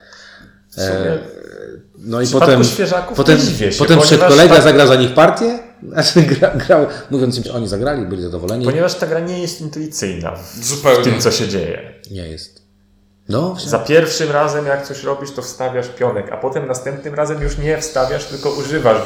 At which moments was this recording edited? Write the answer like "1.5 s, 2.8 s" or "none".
7.4 s

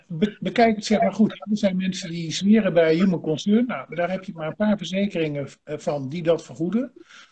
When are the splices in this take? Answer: none

